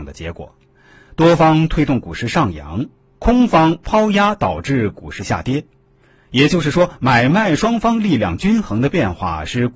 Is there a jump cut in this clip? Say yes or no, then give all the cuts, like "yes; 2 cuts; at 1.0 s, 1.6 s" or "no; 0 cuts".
no; 0 cuts